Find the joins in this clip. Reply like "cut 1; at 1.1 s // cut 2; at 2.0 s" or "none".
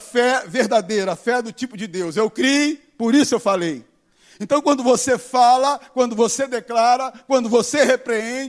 none